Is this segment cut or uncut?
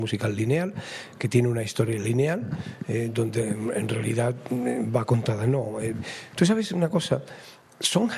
uncut